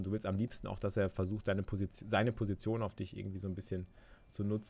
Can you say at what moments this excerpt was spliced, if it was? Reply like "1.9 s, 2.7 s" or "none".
none